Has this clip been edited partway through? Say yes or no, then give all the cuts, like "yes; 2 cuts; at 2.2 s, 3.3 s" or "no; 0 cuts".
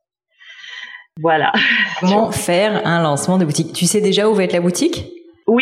yes; 1 cut; at 2.0 s